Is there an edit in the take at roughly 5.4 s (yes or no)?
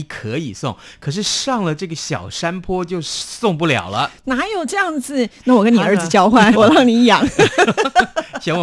yes